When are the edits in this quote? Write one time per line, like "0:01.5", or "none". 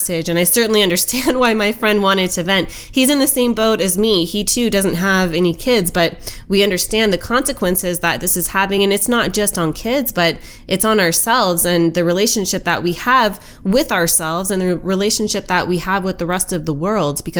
none